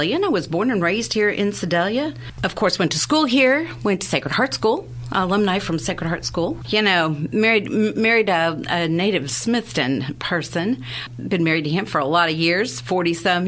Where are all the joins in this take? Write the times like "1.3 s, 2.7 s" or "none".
none